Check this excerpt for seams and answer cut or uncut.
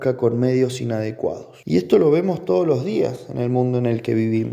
cut